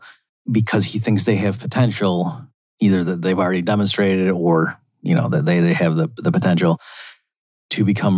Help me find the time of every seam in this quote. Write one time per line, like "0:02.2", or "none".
none

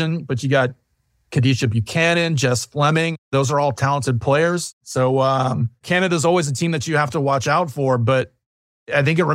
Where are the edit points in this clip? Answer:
none

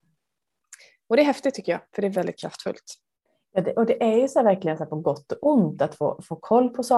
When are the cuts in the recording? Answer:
0:02.1

